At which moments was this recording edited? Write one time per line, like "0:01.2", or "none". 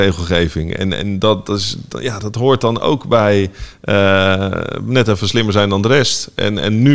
none